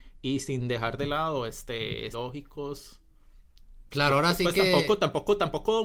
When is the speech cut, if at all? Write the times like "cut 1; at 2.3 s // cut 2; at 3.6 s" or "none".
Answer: cut 1; at 2.1 s // cut 2; at 3.9 s